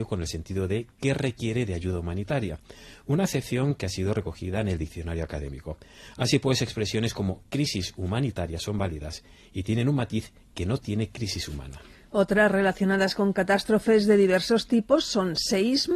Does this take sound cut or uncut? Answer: uncut